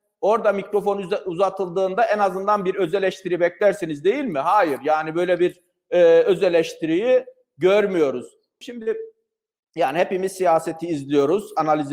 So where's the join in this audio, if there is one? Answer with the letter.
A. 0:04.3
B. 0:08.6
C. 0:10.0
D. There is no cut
B